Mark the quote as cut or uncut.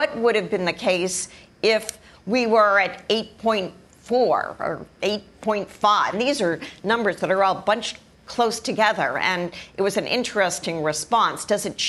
cut